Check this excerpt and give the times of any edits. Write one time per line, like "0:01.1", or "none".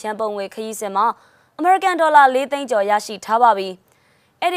none